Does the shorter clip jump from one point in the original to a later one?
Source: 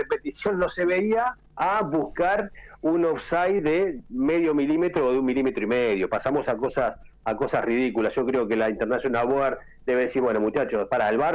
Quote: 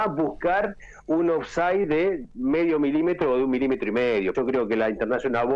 yes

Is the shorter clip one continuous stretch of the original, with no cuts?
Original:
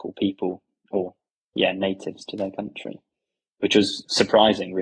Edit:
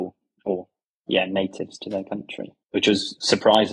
no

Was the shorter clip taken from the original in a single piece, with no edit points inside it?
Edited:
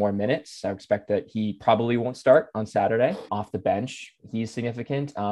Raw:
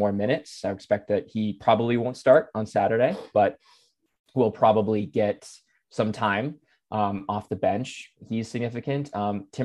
no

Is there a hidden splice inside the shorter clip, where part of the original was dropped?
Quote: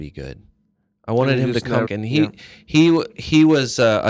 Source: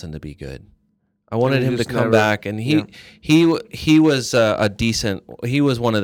yes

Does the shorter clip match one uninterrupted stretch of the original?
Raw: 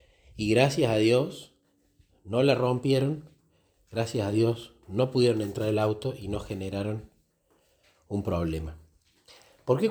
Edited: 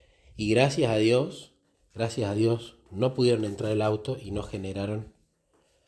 no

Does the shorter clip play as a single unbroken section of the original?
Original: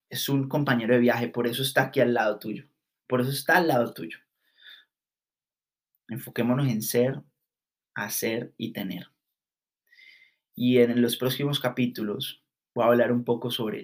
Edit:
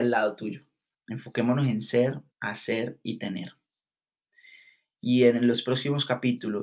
no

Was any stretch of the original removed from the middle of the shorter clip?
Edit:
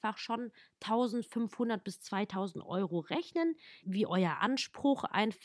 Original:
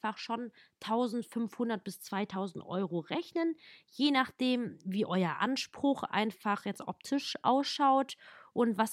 yes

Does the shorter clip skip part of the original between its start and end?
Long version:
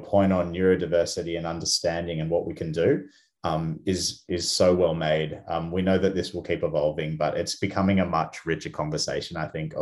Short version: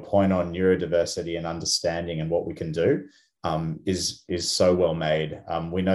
no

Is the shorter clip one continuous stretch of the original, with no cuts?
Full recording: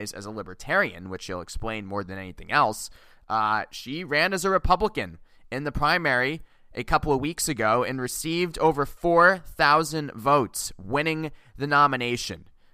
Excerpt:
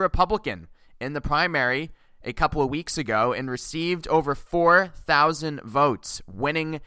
yes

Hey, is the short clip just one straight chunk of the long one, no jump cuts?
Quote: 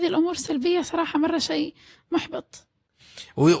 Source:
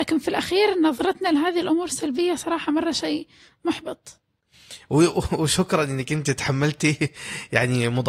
yes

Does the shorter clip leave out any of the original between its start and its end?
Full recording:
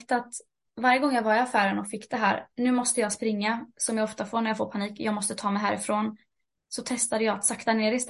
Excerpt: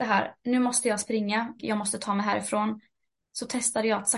yes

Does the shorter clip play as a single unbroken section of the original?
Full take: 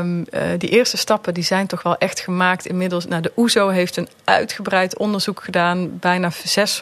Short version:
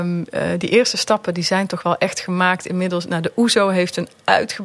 yes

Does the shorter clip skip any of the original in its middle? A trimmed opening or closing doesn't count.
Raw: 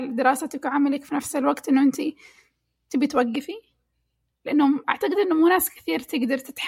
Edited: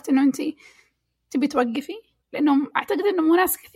yes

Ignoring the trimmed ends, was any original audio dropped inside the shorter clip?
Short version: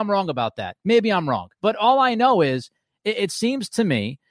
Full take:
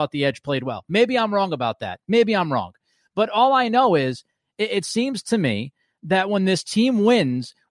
yes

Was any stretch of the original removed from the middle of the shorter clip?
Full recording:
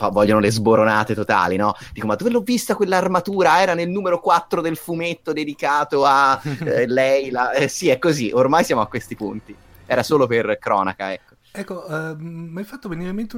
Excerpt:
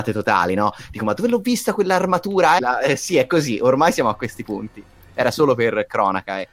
yes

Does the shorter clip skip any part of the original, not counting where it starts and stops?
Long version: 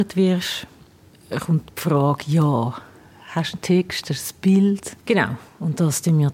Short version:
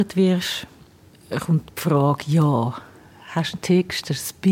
no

